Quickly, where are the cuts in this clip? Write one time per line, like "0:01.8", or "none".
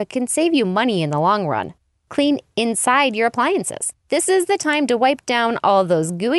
0:02.0
0:04.0